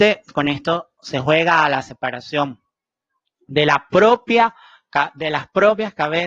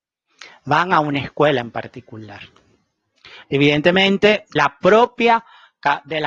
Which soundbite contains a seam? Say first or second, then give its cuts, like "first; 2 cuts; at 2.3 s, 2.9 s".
second; 2 cuts; at 3.4 s, 4.6 s